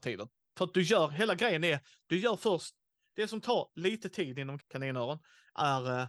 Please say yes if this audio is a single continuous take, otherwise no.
no